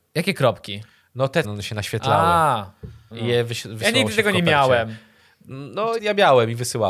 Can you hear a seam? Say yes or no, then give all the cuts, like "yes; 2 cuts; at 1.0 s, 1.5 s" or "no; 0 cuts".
yes; 3 cuts; at 1.4 s, 3.1 s, 6.0 s